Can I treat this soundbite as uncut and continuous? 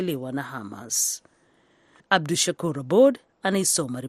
no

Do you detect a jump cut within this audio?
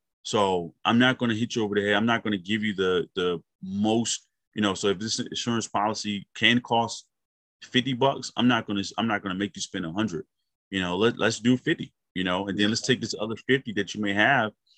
no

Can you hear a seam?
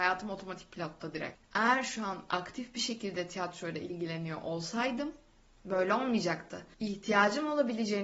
yes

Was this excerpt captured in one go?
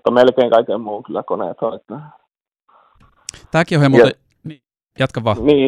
yes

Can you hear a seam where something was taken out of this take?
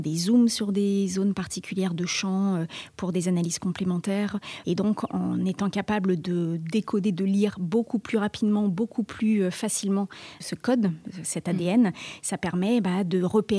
yes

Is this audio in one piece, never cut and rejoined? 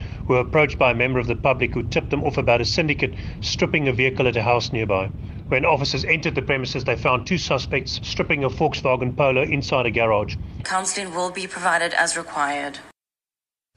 no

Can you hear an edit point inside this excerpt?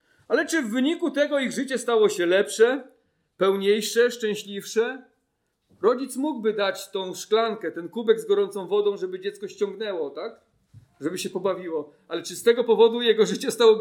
no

